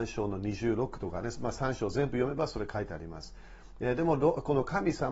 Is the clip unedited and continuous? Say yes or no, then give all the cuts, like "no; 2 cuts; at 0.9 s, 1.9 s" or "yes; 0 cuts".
yes; 0 cuts